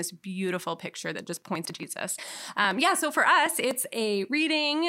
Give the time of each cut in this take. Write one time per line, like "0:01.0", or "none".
none